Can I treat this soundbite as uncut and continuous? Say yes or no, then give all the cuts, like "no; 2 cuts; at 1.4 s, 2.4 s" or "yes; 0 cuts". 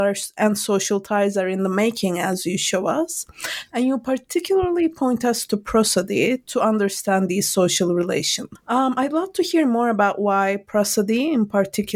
no; 1 cut; at 8.5 s